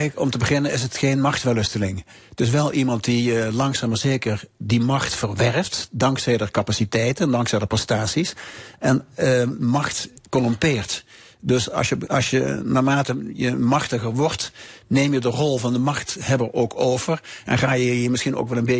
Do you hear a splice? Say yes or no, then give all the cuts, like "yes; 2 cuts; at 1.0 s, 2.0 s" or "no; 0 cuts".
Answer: no; 0 cuts